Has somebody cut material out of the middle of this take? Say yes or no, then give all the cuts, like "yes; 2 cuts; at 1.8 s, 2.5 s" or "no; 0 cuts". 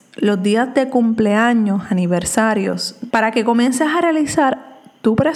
yes; 1 cut; at 3.1 s